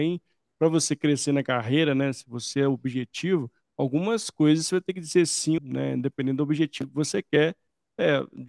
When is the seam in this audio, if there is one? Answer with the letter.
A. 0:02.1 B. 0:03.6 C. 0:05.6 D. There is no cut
C